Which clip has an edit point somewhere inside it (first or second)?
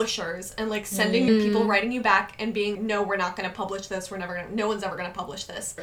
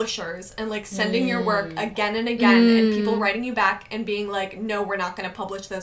first